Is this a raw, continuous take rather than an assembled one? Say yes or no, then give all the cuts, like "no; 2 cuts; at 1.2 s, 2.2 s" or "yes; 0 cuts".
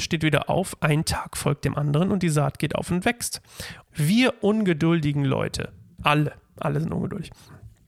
no; 2 cuts; at 3.9 s, 6.0 s